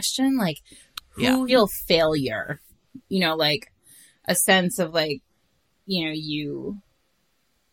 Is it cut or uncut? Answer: cut